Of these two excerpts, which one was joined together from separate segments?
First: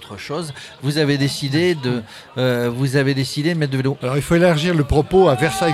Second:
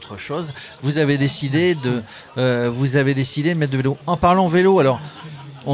first; 1 cut; at 4.0 s

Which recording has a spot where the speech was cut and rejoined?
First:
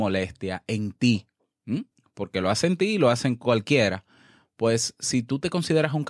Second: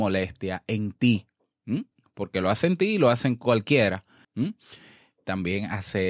second; 1 cut; at 4.2 s

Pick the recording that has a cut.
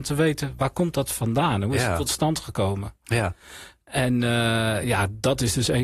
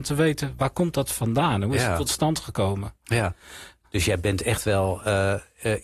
second; 1 cut; at 3.8 s

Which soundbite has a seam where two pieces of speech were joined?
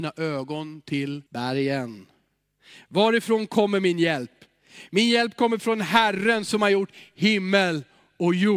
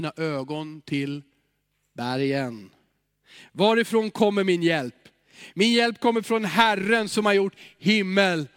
first; 1 cut; at 1.3 s

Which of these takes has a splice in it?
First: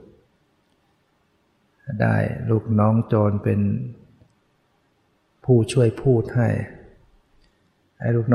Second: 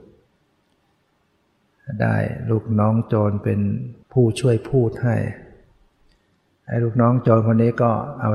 second; 1 cut; at 4.0 s

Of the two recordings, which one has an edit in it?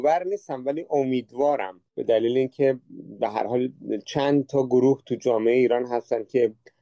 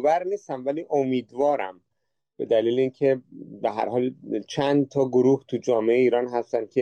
first; 1 cut; at 1.9 s

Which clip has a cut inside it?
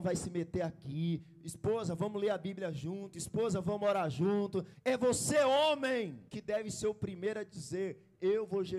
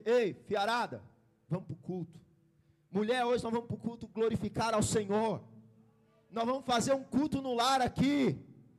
first; 2 cuts; at 4.7 s, 6.3 s

